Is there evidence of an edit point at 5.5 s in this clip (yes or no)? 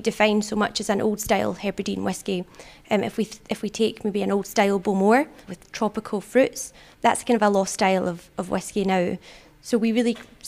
yes